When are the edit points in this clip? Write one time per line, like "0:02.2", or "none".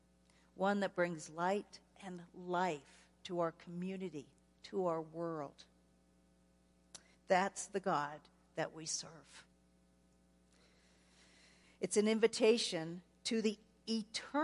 0:07.1
0:11.6